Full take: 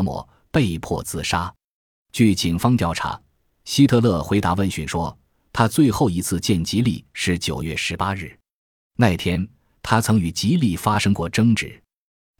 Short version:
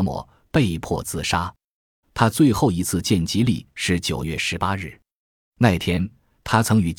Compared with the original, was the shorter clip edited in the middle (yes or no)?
yes